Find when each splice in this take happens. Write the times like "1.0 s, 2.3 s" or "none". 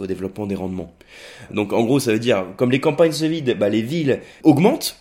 1.5 s